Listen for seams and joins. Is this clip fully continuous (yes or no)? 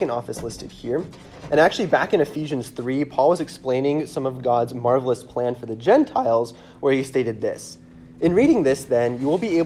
yes